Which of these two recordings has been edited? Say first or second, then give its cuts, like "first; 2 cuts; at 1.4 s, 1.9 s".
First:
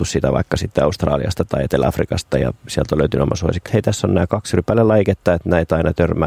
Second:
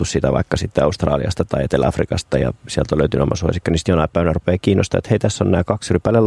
first; 1 cut; at 3.6 s